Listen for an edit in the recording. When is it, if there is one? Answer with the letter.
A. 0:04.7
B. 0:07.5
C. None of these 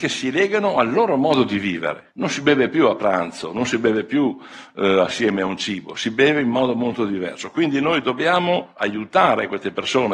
C